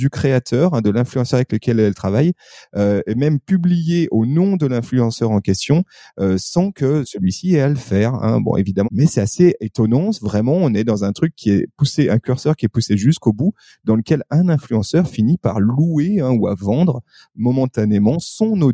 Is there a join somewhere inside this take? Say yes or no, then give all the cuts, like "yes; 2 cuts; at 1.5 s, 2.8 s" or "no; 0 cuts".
yes; 1 cut; at 8.8 s